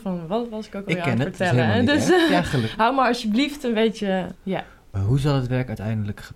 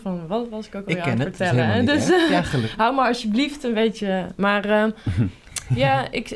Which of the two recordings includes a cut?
first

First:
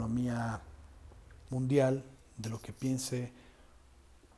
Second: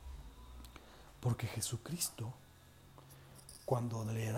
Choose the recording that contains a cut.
first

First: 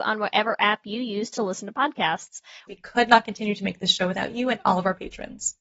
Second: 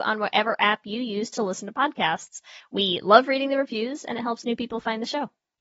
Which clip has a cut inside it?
first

